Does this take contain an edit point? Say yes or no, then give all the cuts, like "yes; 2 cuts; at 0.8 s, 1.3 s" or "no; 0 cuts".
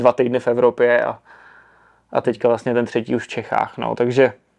no; 0 cuts